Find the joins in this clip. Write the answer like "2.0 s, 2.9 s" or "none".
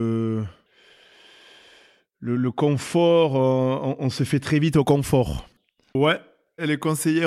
6.0 s